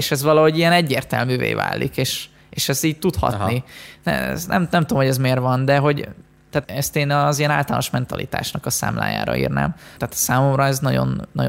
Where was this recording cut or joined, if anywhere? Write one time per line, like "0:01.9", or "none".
0:06.6
0:10.0